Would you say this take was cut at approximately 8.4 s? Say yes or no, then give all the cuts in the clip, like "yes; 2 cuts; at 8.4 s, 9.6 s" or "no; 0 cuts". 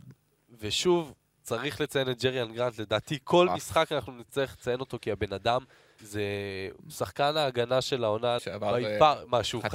yes; 2 cuts; at 6.0 s, 8.4 s